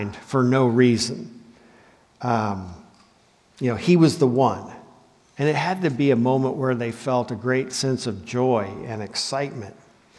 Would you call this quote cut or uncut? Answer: uncut